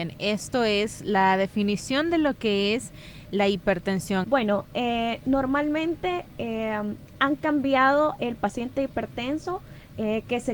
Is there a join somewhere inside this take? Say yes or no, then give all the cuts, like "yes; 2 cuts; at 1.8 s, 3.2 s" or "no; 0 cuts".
yes; 1 cut; at 4.2 s